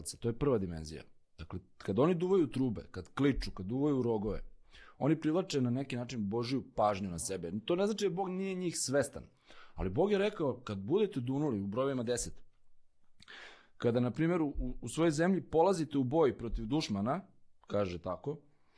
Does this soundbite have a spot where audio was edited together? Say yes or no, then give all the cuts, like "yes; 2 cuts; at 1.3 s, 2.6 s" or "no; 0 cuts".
no; 0 cuts